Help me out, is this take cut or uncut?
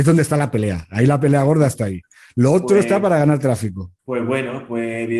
cut